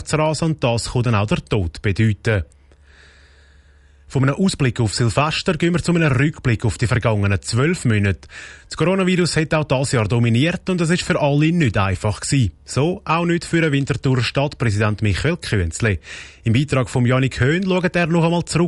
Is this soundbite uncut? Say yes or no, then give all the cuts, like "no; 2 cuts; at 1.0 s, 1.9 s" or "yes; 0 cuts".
yes; 0 cuts